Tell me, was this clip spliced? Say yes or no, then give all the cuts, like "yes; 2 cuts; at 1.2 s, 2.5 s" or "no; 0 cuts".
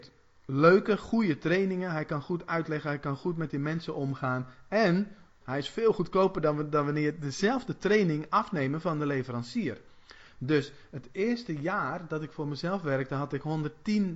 yes; 1 cut; at 5.4 s